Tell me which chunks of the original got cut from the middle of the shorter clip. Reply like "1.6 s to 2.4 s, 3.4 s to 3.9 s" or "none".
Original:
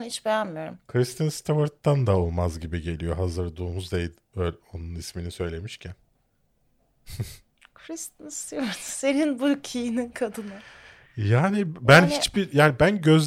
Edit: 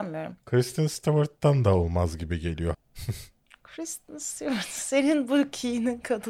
3.2 s to 6.8 s